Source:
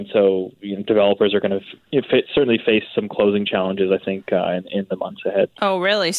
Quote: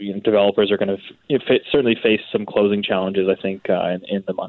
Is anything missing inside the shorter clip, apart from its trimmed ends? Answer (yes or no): no